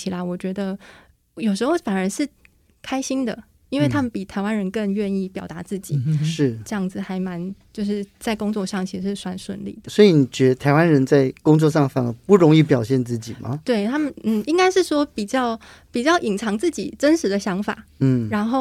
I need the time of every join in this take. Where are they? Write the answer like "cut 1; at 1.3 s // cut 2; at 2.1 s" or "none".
none